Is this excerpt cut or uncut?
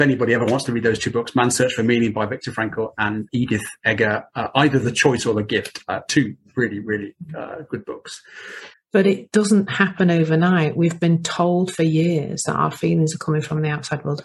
cut